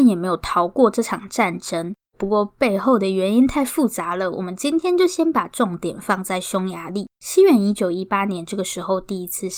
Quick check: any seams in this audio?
yes; 2 cuts; at 2.1 s, 7.1 s

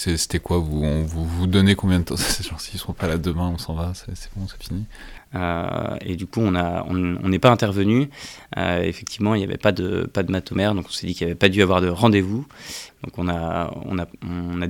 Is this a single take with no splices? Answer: no; 2 cuts; at 5.2 s, 12.9 s

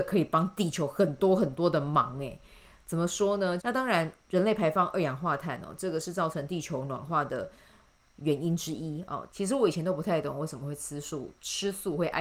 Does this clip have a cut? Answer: yes; 2 cuts; at 3.6 s, 9.3 s

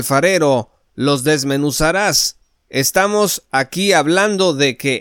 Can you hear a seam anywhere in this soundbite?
no; 0 cuts

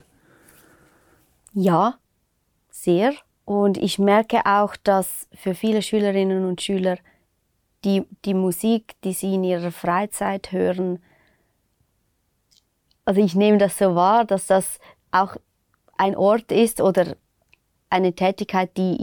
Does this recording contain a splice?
no; 0 cuts

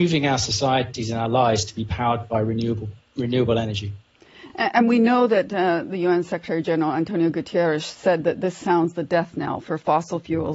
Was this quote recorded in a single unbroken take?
yes; 0 cuts

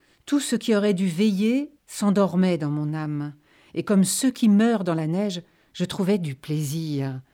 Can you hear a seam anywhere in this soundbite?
yes; 1 cut; at 1.8 s

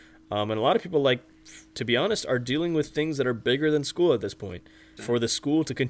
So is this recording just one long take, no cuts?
no; 1 cut; at 5.0 s

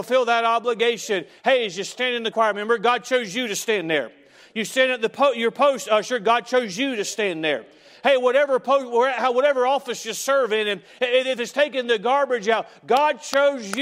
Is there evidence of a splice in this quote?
yes; 1 cut; at 2.3 s

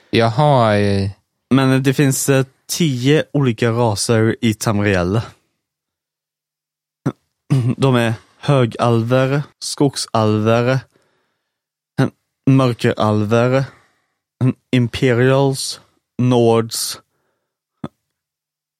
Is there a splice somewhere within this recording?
yes; 1 cut; at 9.5 s

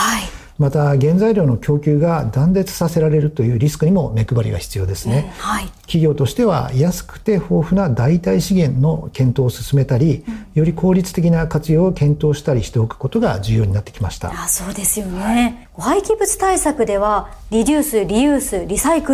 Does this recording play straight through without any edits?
yes; 0 cuts

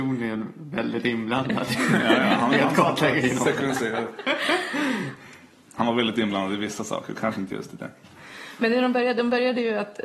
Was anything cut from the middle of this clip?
no; 0 cuts

